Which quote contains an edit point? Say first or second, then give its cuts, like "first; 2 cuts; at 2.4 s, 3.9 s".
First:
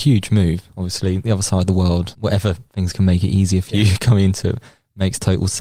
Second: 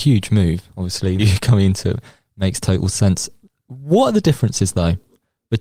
second; 1 cut; at 1.2 s